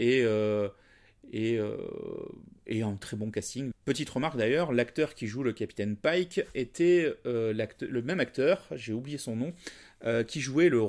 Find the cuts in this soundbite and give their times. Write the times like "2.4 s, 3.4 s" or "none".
3.7 s